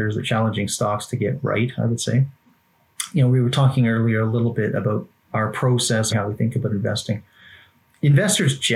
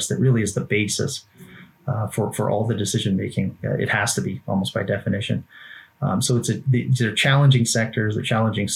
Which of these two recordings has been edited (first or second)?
first